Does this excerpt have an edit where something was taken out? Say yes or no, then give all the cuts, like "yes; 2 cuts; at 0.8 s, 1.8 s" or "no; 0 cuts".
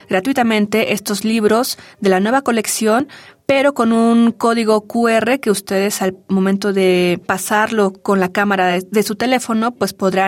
no; 0 cuts